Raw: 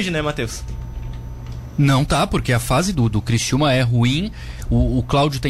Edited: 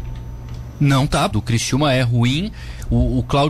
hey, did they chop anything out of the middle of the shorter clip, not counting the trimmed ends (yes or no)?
yes